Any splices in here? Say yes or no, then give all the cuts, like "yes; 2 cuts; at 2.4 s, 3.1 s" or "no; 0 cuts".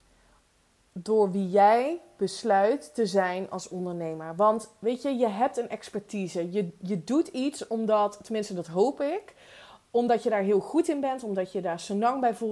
no; 0 cuts